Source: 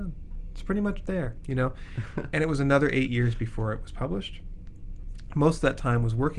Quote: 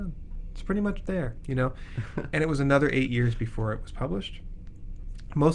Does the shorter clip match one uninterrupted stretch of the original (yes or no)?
yes